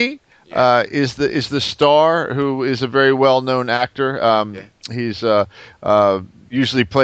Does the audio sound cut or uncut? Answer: uncut